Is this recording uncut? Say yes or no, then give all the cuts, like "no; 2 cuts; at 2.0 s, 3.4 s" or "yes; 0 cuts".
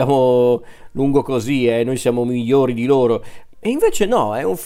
yes; 0 cuts